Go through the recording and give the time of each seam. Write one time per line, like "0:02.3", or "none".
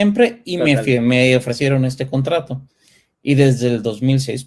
none